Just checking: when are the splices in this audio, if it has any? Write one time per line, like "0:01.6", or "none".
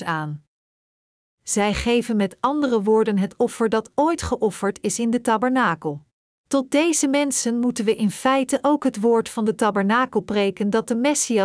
0:06.3